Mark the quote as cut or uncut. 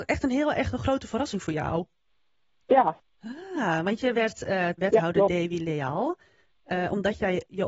cut